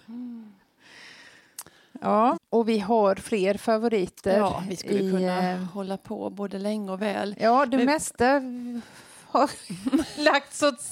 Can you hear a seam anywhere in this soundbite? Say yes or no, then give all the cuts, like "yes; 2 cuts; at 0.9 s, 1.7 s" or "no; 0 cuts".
yes; 1 cut; at 2.4 s